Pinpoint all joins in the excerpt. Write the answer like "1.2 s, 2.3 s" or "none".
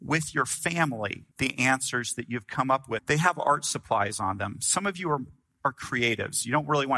1.3 s, 3.0 s